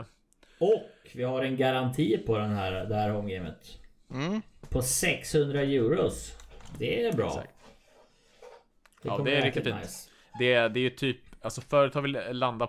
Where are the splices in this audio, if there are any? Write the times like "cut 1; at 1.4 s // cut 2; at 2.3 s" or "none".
none